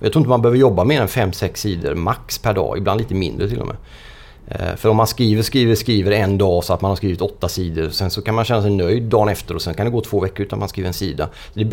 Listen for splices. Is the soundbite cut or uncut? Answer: uncut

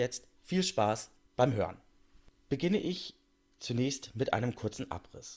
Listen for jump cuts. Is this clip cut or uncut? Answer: uncut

